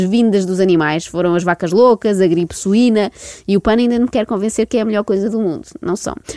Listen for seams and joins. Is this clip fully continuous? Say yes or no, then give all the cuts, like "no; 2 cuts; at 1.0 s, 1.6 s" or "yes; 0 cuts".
yes; 0 cuts